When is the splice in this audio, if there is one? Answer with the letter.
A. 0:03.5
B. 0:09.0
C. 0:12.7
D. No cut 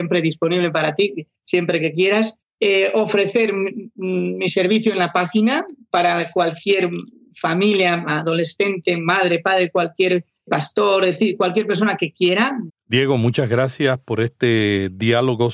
C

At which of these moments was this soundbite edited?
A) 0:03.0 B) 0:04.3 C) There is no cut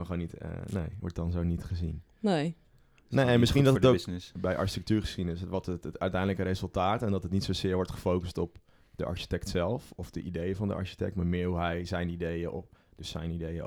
B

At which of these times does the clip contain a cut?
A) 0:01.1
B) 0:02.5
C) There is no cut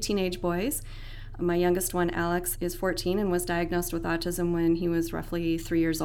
B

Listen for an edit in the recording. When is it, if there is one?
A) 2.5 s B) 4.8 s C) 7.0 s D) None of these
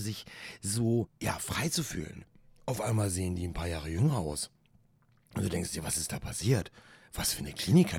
D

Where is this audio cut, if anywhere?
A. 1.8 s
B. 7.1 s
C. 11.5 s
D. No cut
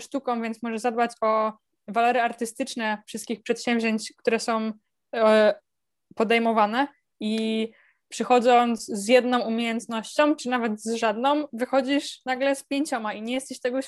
B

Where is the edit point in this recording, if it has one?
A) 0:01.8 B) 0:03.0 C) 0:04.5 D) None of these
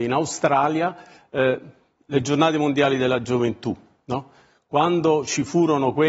D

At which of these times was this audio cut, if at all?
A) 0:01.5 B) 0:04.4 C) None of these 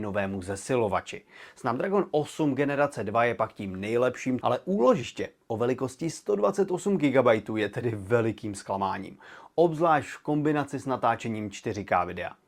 B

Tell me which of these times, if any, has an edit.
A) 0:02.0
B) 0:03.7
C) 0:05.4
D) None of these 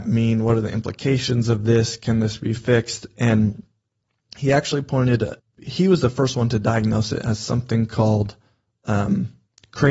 C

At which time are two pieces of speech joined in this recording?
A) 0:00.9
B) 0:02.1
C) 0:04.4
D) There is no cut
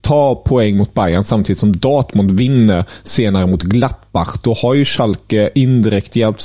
D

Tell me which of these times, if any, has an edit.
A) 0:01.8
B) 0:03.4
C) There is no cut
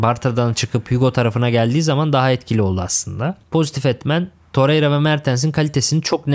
B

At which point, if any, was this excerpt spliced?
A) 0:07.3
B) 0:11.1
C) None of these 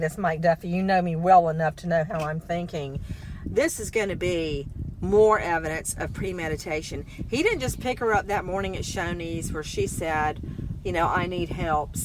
C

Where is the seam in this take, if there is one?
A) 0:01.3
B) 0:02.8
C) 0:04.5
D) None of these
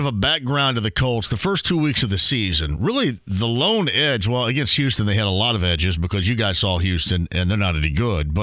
D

